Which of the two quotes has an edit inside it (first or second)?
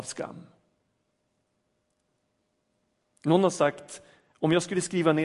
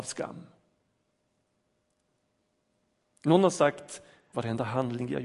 second